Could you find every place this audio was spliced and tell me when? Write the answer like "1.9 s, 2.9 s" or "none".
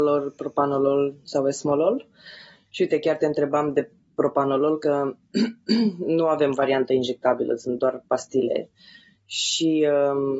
none